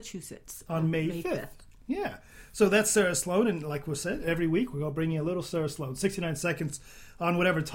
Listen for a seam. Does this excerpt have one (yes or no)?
no